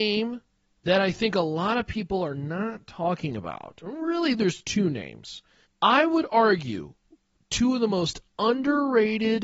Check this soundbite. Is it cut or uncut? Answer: cut